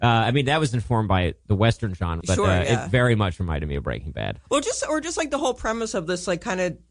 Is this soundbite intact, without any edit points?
no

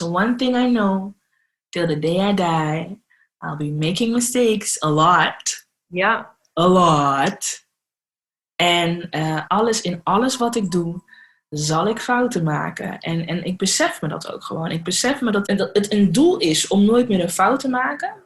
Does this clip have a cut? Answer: yes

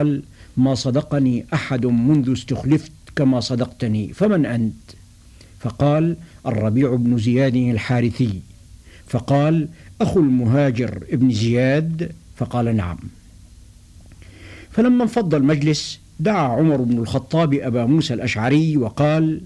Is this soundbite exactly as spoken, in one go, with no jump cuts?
yes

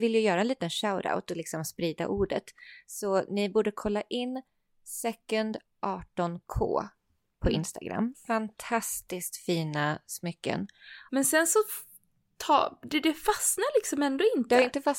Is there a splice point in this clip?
yes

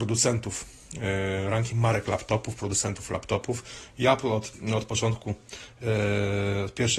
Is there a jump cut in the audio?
no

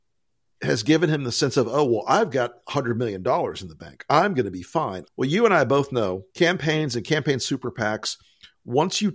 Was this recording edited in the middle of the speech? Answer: yes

